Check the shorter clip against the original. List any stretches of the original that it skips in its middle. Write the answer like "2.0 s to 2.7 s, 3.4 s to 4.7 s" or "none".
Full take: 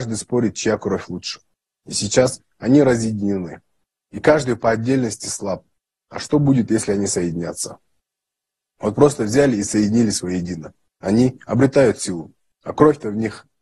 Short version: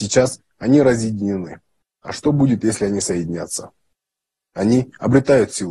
3.8 s to 5.9 s, 8.5 s to 10.9 s